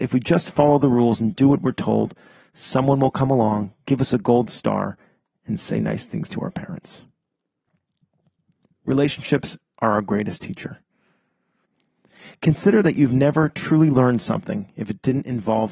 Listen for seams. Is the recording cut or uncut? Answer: uncut